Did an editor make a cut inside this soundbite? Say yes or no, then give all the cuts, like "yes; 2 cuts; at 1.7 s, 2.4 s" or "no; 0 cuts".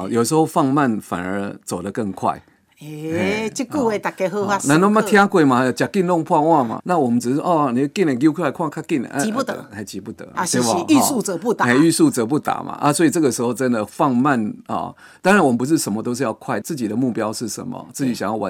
yes; 3 cuts; at 6.8 s, 10.3 s, 16.6 s